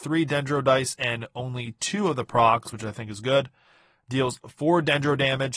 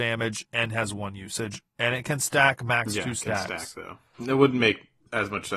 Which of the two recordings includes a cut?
second; 1 cut; at 4.1 s

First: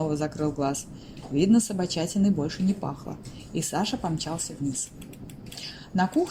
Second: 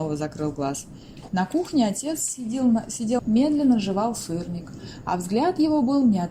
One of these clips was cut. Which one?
second; 2 cuts; at 1.3 s, 3.2 s

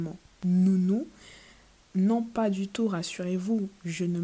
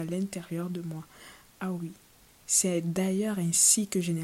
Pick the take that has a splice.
first; 1 cut; at 1.8 s

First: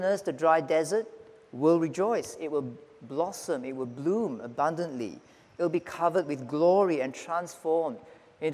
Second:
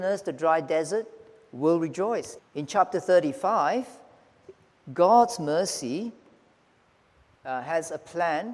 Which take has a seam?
second; 1 cut; at 2.4 s

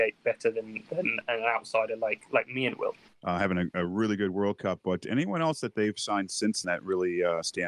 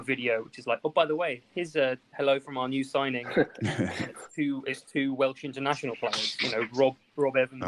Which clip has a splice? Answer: first; 2 cuts; at 3.1 s, 6.6 s

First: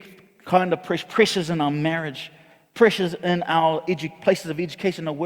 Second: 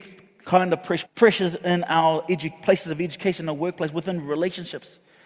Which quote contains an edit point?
second; 1 cut; at 1.0 s

